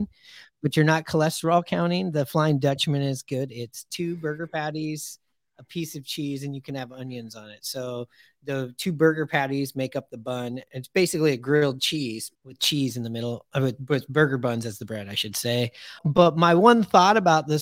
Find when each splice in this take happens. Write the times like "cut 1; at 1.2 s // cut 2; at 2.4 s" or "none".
cut 1; at 12.4 s // cut 2; at 16.0 s